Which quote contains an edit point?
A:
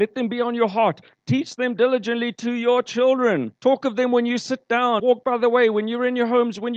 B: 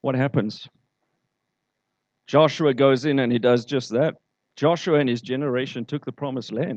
A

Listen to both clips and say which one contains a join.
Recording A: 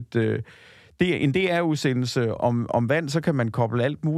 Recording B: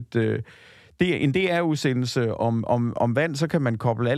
A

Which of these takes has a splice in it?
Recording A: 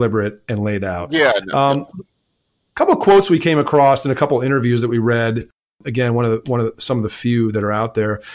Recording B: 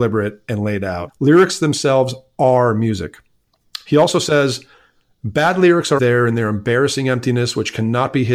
B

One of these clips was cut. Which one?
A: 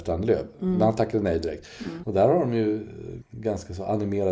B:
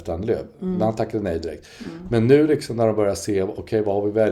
A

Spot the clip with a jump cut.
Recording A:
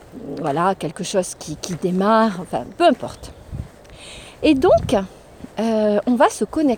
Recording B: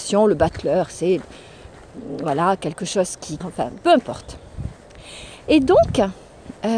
B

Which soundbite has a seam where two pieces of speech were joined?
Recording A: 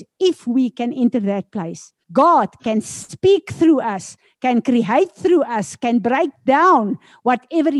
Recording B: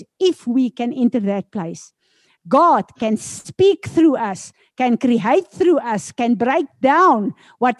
A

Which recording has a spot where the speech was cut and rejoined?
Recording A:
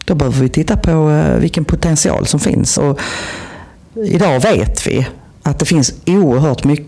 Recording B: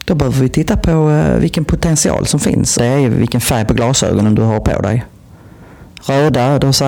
B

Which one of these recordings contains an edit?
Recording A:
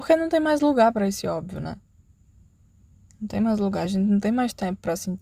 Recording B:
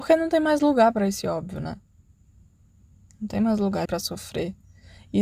B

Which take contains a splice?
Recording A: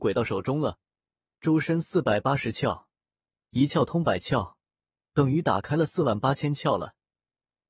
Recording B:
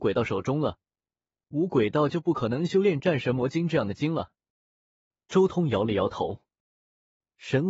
A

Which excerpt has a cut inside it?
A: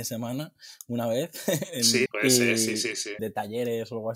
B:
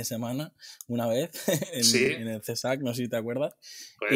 A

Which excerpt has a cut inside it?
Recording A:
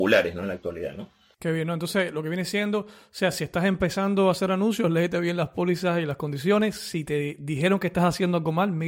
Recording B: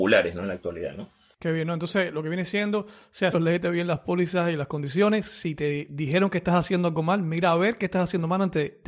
B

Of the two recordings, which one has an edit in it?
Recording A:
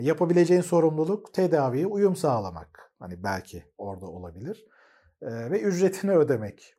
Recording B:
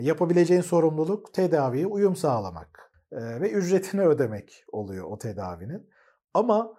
B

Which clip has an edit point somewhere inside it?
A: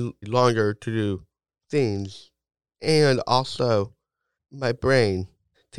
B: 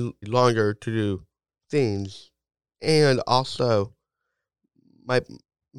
A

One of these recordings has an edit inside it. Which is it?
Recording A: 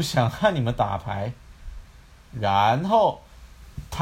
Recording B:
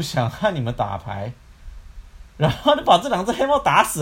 A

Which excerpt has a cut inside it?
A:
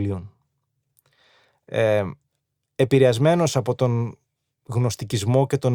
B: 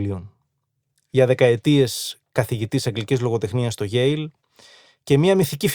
B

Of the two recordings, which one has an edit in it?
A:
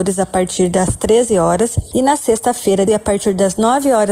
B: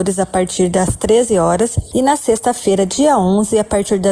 A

